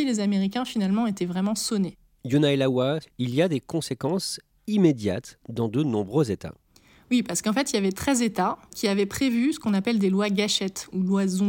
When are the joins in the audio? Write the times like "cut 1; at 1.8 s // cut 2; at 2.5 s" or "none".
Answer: cut 1; at 3.0 s